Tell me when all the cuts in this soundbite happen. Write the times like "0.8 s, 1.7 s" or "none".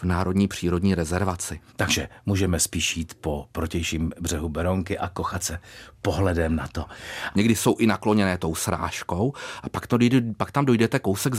1.7 s, 7.3 s